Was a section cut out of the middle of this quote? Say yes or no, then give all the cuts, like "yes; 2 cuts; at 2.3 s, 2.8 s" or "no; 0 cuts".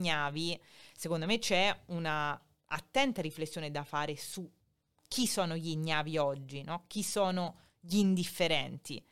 no; 0 cuts